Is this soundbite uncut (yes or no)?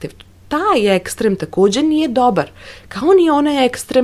yes